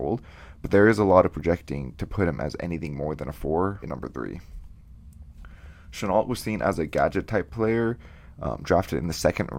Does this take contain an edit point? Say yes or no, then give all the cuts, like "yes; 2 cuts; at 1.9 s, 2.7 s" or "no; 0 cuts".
yes; 1 cut; at 3.8 s